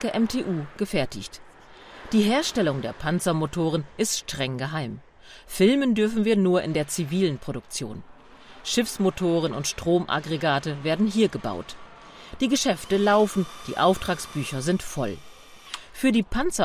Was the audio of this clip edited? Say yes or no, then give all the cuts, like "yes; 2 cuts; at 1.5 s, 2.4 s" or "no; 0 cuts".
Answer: no; 0 cuts